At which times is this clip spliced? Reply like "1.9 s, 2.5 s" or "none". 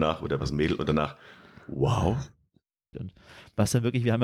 2.9 s